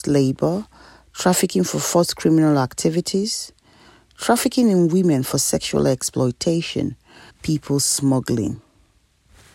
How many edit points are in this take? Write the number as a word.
one